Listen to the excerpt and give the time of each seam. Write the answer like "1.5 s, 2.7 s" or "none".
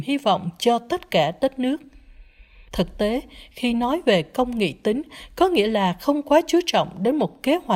2.7 s